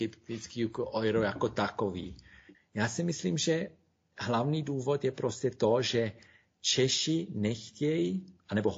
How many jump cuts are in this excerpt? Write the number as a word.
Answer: one